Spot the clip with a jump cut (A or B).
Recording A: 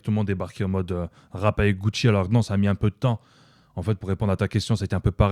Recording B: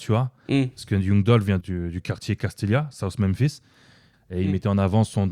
B